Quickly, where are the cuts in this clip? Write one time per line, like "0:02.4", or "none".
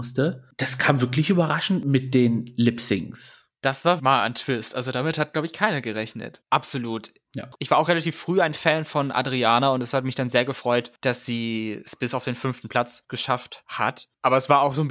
0:04.0
0:06.4